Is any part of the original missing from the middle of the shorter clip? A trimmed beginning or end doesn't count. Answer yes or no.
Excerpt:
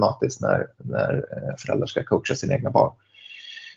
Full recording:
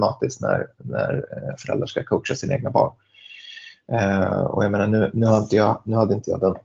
no